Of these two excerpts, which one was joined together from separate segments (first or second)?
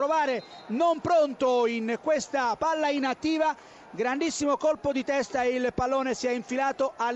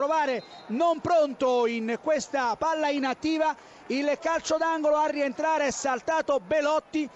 first